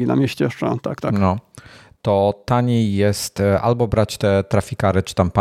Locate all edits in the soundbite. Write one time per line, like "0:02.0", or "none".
none